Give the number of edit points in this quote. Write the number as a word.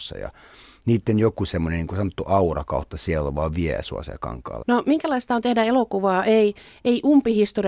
one